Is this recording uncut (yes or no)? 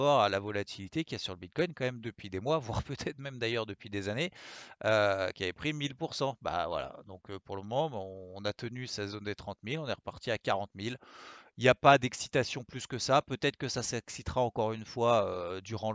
yes